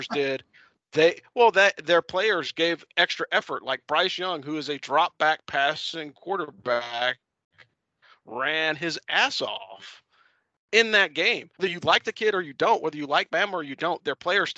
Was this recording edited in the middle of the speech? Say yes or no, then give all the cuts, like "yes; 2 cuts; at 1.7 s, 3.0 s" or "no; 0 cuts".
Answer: no; 0 cuts